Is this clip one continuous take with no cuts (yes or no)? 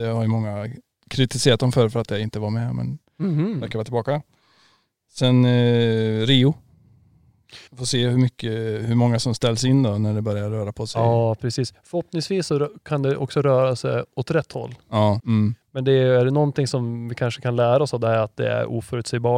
no